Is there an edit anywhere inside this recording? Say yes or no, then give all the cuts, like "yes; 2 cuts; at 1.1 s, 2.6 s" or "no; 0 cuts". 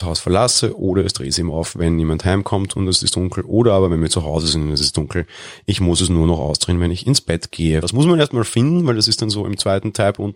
yes; 1 cut; at 7.8 s